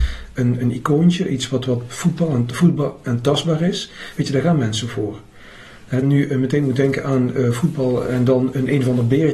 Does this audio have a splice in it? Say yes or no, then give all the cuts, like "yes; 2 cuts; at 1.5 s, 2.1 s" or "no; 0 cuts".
yes; 1 cut; at 6.0 s